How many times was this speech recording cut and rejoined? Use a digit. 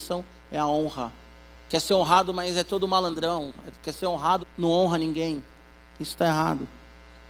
2